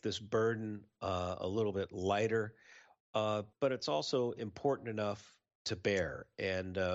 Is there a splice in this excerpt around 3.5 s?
yes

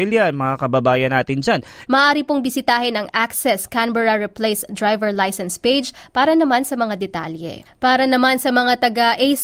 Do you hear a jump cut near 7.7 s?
yes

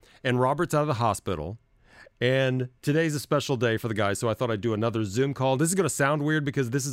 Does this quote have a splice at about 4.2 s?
no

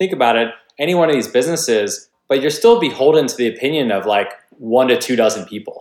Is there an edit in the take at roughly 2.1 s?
yes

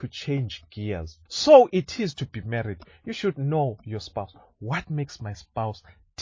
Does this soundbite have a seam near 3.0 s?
no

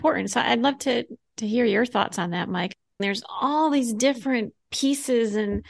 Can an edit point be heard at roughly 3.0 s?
yes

